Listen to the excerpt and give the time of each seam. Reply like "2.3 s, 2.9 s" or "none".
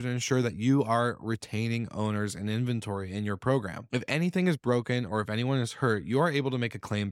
none

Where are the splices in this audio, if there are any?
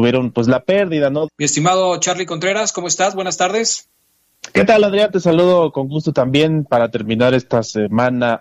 1.3 s

